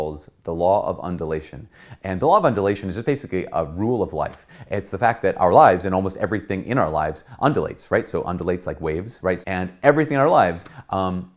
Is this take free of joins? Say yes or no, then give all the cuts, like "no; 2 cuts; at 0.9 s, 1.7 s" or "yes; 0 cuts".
no; 1 cut; at 9.4 s